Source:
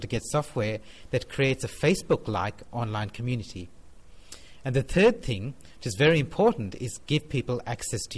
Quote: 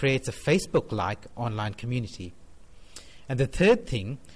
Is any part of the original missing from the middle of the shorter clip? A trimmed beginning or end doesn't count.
no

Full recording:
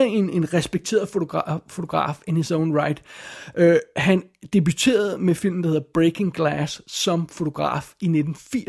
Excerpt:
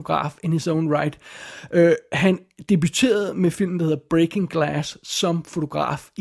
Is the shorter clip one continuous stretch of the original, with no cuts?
yes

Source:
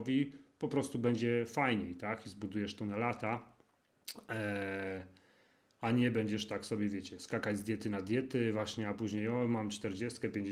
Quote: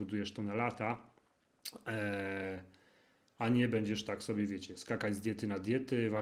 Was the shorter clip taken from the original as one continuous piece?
yes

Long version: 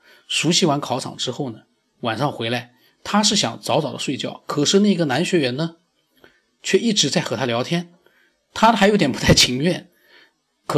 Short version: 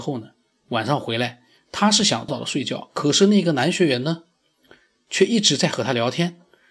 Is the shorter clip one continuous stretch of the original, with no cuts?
no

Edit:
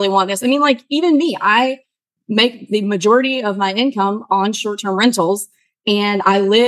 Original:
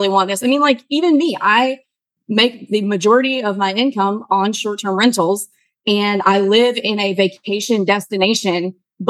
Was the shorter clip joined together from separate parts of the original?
no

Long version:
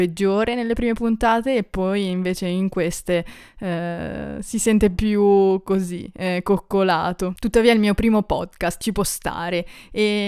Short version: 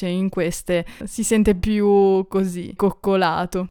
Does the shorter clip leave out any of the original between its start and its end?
yes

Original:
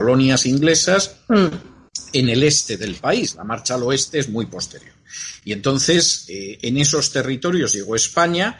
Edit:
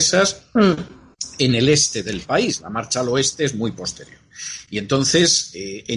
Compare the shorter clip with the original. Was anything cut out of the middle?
no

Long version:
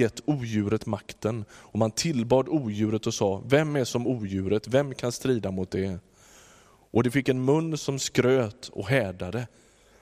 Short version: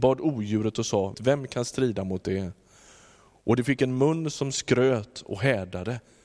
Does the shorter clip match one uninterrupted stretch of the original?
no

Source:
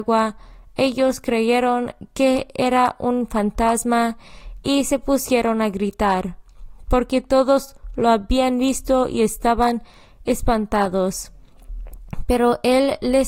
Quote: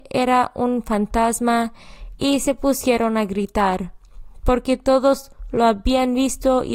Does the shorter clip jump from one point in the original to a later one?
no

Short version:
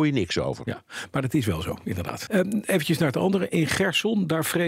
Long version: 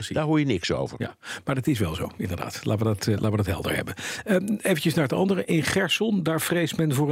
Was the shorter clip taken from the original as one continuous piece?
no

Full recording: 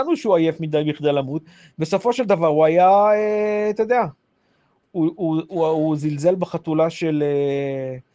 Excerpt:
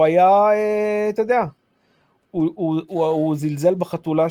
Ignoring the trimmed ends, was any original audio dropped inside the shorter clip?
no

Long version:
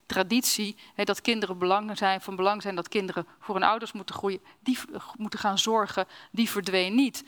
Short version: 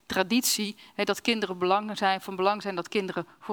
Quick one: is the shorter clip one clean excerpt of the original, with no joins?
yes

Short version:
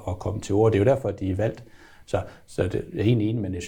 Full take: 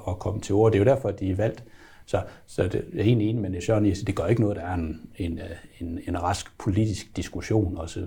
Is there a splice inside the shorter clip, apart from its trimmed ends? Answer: no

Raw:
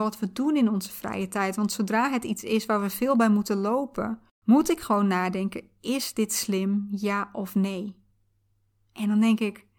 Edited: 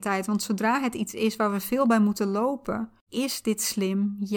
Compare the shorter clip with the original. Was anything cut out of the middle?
yes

